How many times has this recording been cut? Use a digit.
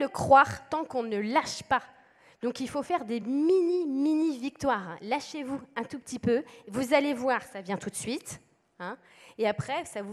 0